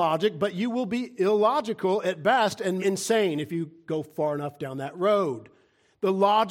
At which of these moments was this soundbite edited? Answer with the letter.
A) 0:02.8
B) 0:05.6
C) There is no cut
A